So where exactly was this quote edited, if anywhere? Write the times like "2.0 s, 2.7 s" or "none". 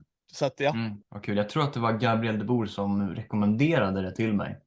1.0 s